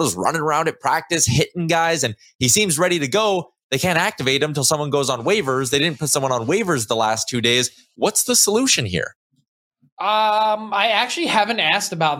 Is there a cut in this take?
no; 0 cuts

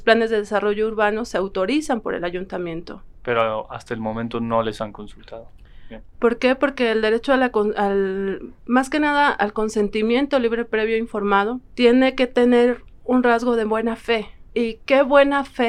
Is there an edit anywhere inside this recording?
yes; 2 cuts; at 3.2 s, 6.1 s

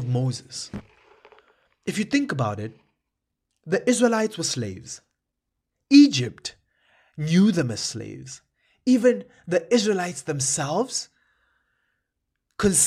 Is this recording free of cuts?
yes; 0 cuts

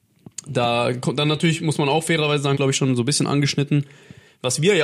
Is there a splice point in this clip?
yes; 1 cut; at 2.6 s

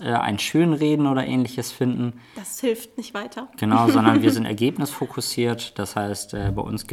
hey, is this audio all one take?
yes; 0 cuts

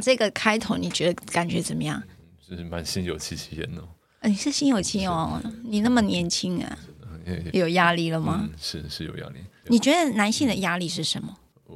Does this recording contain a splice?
yes; 2 cuts; at 4.8 s, 7.5 s

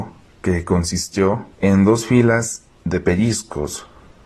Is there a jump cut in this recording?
yes; 1 cut; at 1.5 s

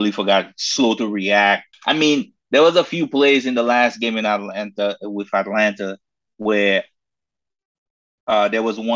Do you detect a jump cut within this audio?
yes; 1 cut; at 1.7 s

